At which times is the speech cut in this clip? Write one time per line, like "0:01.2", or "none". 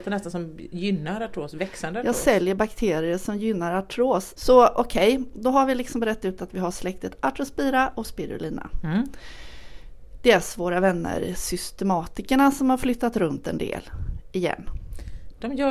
0:04.4

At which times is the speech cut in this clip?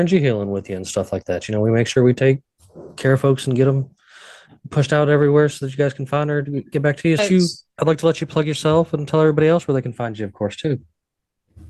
0:07.2

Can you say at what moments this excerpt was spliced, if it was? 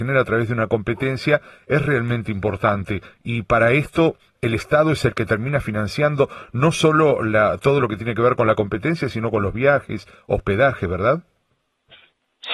none

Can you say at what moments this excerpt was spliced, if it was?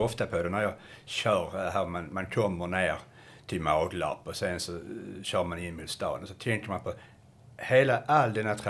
none

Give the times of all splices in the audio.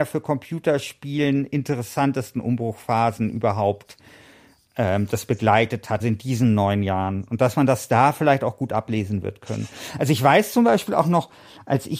0:06.0

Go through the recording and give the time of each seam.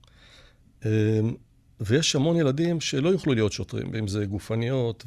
0:03.9

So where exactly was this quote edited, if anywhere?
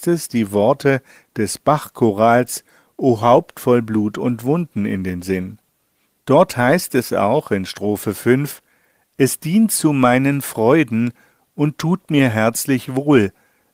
none

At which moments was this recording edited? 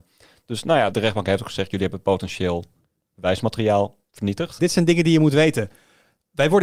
0:00.9
0:04.6

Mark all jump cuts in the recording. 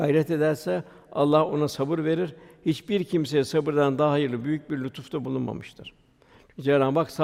none

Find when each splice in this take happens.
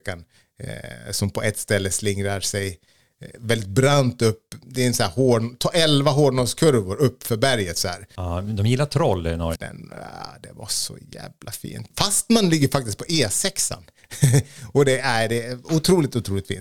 0:08.2
0:09.6

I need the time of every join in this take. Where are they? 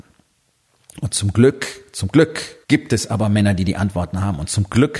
0:02.6

